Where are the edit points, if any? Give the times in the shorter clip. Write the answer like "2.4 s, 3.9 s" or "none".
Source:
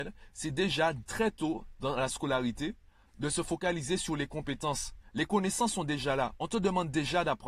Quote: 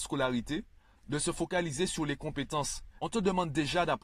3.0 s